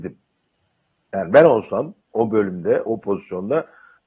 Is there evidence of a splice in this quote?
yes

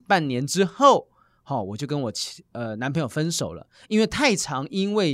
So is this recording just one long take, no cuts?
yes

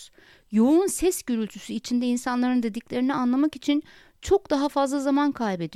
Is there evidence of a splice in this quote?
no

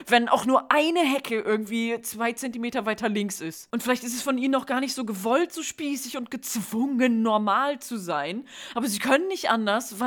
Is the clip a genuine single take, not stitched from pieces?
yes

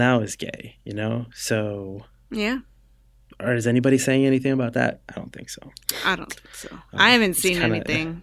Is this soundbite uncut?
yes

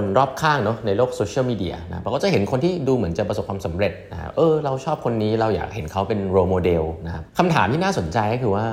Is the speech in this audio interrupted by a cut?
yes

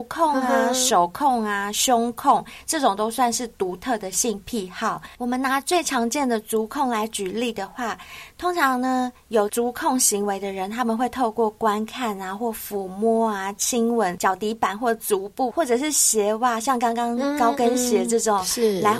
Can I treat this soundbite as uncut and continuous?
yes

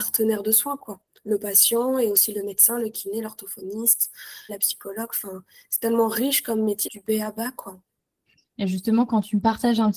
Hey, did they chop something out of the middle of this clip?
yes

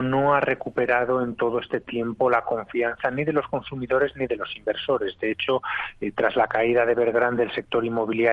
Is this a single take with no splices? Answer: yes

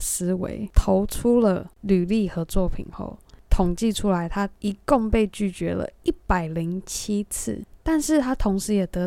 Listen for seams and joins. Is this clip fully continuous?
yes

